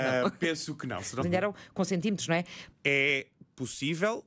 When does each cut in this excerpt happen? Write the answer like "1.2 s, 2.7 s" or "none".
1.2 s, 2.7 s